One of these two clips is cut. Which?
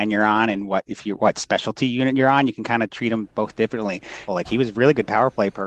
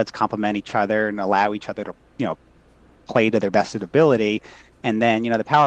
first; 1 cut; at 4.3 s

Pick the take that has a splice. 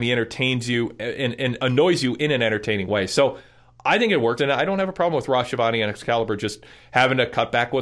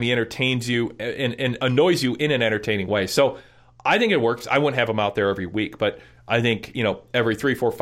first; 1 cut; at 4.4 s

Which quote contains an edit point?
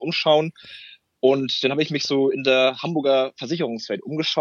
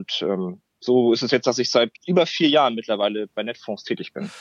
second; 1 cut; at 2.0 s

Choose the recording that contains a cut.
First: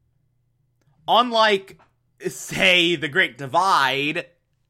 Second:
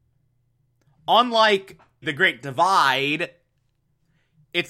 second; 1 cut; at 2.0 s

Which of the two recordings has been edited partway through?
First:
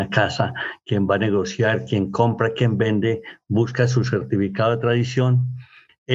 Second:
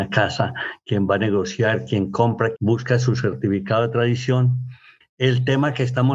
second; 1 cut; at 2.5 s

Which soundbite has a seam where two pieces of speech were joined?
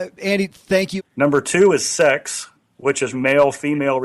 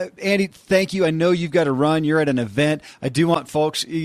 first; 2 cuts; at 1.0 s, 3.1 s

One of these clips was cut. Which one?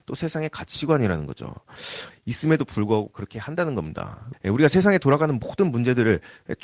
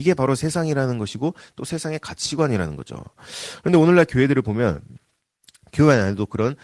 first; 2 cuts; at 2.1 s, 4.3 s

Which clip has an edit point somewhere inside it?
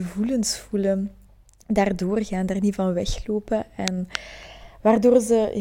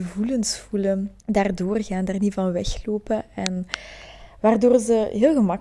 second; 1 cut; at 1.2 s

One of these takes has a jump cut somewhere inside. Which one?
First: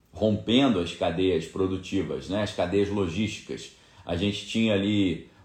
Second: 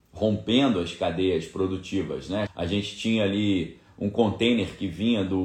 second; 1 cut; at 2.5 s

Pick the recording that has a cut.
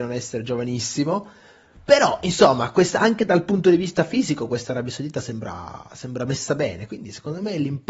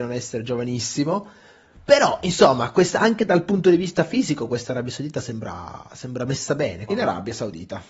second; 1 cut; at 6.9 s

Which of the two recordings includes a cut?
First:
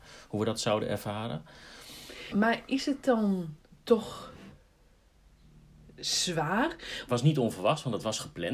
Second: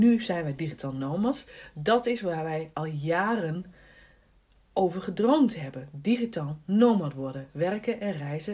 first; 2 cuts; at 2.3 s, 7.1 s

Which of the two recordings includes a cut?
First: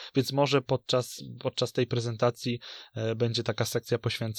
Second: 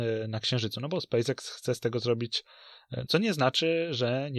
second; 1 cut; at 3.1 s

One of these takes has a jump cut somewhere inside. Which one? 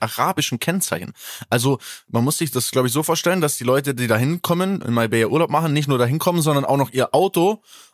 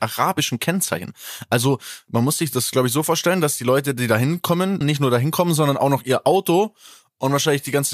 second; 1 cut; at 4.8 s

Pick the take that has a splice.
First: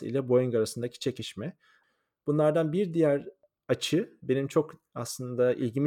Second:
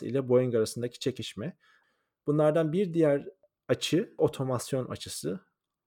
second; 1 cut; at 4.2 s

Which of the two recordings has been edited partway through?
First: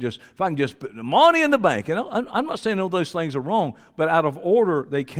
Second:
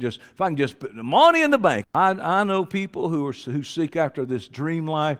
second; 1 cut; at 1.8 s

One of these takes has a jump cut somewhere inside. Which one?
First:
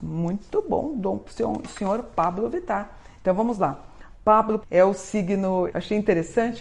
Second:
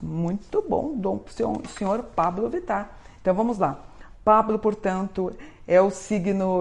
first; 2 cuts; at 4.6 s, 5.7 s

